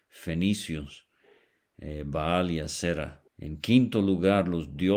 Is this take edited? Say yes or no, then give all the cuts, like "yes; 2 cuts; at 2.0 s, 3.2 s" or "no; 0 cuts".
yes; 1 cut; at 3.3 s